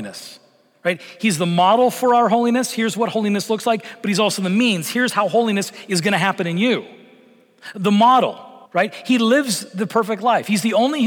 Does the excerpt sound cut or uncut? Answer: cut